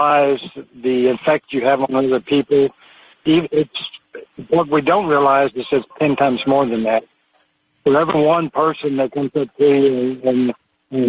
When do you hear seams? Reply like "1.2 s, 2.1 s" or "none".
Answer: 5.9 s